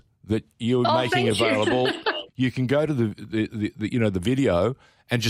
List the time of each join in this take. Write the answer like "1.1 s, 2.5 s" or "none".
2.3 s